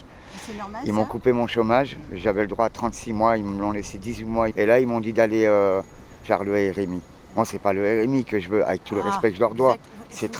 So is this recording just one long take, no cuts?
no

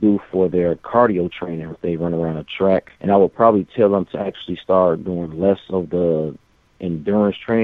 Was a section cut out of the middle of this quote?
yes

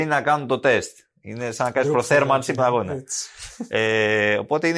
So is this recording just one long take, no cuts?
no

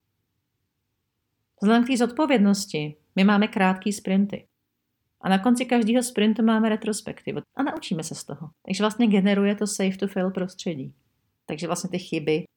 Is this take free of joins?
no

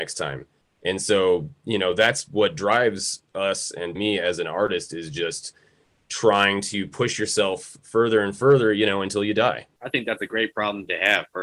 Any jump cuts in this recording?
yes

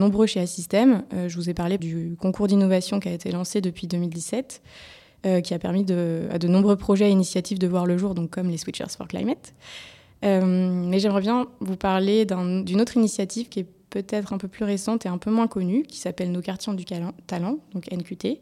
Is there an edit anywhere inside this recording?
yes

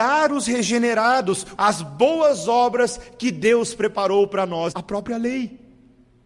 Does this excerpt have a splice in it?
yes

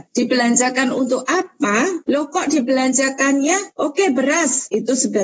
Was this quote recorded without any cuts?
no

